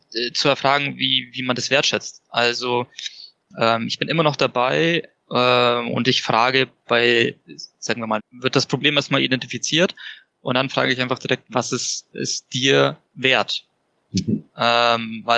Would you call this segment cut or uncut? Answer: cut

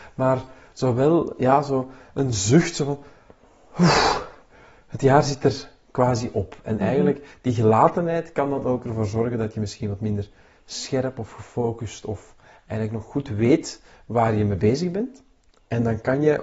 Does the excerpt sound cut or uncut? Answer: uncut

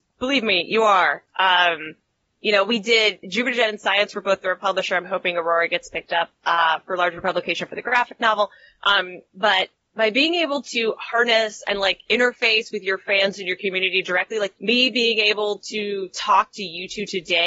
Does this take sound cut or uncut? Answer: cut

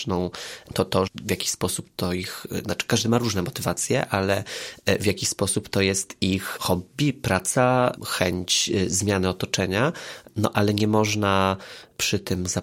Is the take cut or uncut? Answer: cut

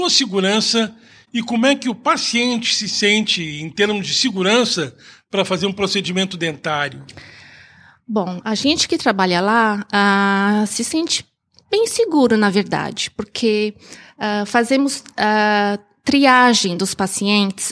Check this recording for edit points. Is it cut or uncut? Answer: uncut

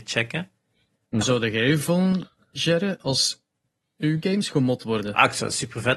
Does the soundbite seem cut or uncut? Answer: cut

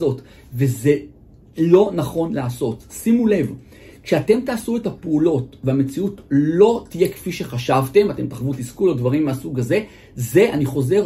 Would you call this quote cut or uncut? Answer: uncut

